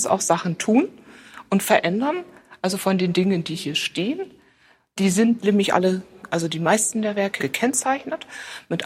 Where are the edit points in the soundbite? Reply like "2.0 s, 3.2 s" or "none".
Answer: 7.4 s